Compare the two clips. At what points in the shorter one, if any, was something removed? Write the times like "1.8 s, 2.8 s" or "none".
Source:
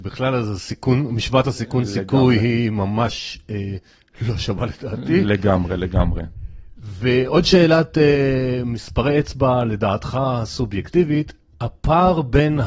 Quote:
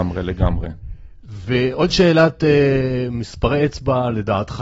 none